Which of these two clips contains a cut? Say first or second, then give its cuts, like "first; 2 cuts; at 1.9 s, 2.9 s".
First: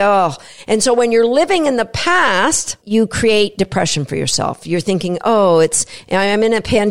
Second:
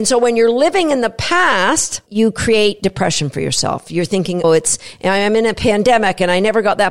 second; 1 cut; at 4.4 s